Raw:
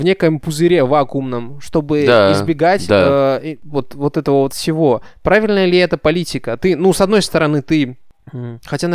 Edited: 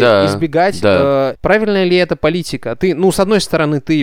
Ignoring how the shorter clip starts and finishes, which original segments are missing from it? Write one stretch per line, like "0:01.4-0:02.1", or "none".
0:03.4-0:05.1